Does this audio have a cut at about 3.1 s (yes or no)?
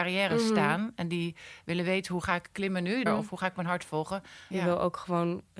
yes